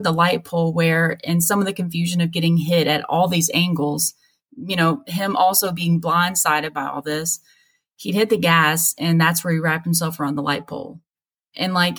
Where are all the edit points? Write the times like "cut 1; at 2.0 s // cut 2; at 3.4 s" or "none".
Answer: none